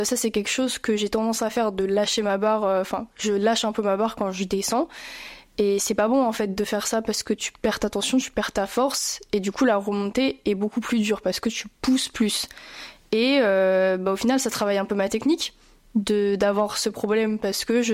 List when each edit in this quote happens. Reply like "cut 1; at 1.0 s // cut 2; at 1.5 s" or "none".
none